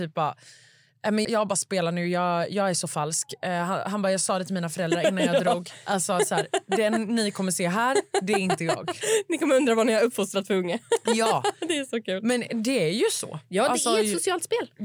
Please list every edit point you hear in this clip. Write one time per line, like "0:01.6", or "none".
0:01.2